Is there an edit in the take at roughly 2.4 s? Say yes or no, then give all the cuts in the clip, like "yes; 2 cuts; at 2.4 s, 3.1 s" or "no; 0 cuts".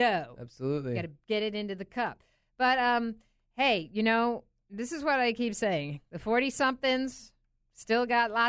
no; 0 cuts